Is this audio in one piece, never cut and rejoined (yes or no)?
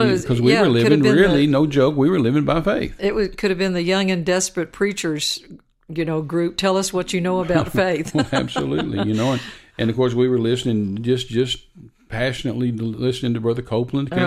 yes